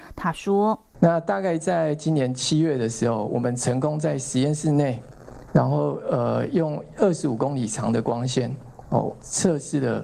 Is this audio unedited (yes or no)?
yes